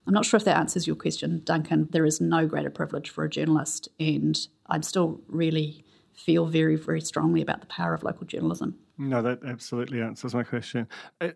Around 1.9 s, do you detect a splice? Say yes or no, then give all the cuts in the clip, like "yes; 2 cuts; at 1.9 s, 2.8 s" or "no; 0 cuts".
yes; 1 cut; at 1.9 s